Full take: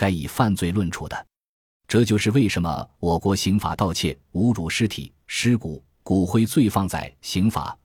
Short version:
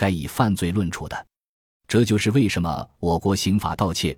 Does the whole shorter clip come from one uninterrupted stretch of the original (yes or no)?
yes